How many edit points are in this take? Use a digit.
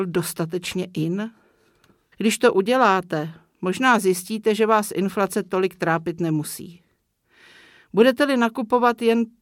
1